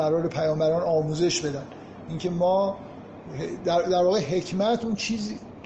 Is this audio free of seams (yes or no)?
yes